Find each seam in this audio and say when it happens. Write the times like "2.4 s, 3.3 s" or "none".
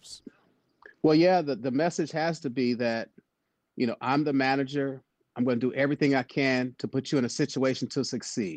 none